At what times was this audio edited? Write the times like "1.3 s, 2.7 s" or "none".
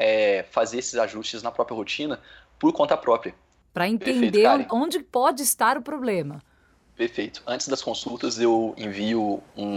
3.6 s, 4.7 s